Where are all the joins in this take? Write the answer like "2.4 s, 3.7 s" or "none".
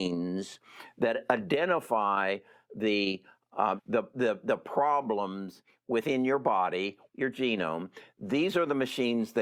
3.8 s, 7.1 s